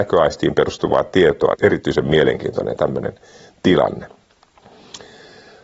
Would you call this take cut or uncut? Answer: cut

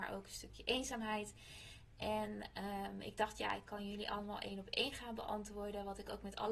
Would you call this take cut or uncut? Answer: uncut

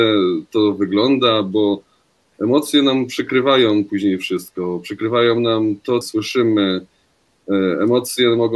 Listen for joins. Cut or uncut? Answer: cut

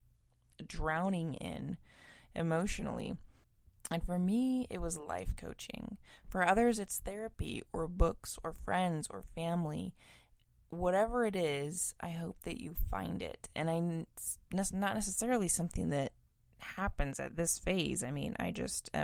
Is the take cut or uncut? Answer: uncut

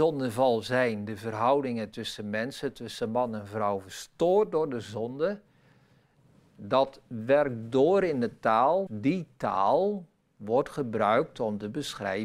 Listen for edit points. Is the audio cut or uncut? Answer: cut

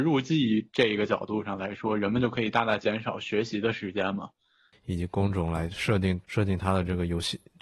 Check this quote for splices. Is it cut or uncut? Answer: cut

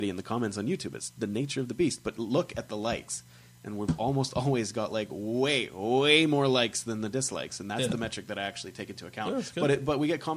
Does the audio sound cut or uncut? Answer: uncut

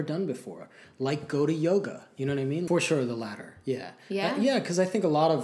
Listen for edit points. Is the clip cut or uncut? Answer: cut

